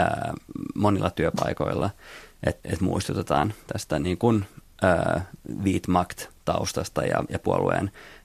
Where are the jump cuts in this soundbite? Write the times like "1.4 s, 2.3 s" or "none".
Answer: 2.6 s, 7.3 s